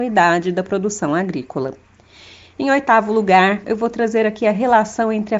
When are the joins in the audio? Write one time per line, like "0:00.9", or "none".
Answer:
0:03.6